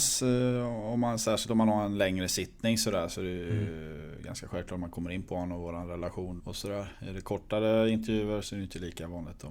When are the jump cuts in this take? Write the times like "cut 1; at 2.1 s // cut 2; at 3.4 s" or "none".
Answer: cut 1; at 6.4 s // cut 2; at 8.4 s